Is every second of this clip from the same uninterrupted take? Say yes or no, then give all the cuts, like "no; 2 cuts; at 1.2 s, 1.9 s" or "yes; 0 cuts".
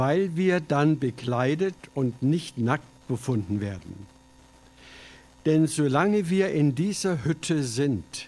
yes; 0 cuts